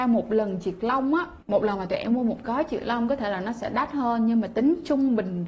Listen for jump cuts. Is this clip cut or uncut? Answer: cut